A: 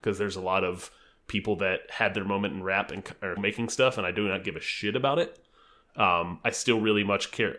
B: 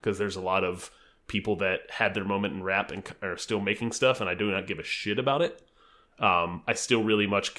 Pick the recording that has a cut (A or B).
A